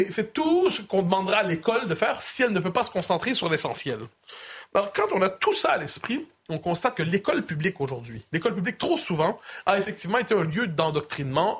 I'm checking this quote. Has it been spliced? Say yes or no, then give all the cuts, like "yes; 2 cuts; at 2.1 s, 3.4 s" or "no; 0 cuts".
no; 0 cuts